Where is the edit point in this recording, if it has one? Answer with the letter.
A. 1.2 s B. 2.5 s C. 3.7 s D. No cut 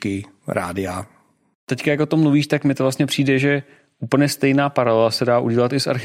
D